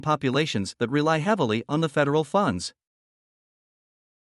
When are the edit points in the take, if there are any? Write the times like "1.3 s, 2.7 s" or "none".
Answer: none